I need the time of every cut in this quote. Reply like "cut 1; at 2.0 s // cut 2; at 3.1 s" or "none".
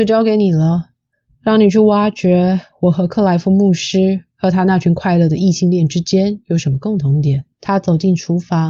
cut 1; at 7.5 s